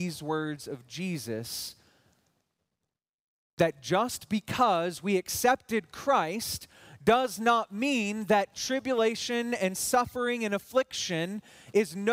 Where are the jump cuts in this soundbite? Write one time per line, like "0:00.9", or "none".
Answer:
none